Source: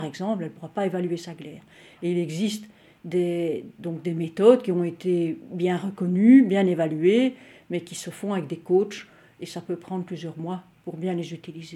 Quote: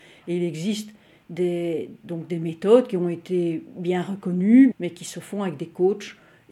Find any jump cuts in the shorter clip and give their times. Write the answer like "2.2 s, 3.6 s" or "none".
4.7 s